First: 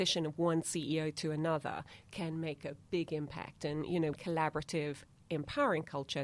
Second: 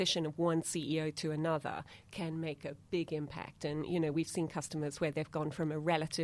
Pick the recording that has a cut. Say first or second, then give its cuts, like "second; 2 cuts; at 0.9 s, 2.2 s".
first; 1 cut; at 4.1 s